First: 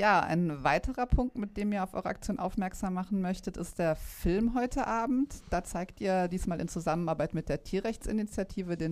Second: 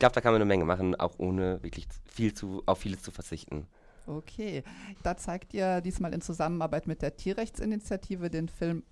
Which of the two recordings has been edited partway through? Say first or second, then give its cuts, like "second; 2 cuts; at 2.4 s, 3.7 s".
second; 1 cut; at 4.9 s